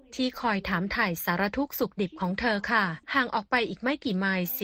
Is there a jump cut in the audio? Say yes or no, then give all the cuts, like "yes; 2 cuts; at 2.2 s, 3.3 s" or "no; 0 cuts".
yes; 1 cut; at 3.0 s